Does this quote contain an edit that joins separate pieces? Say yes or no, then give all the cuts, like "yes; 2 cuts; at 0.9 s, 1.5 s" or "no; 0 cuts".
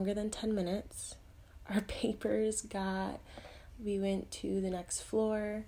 yes; 1 cut; at 3.7 s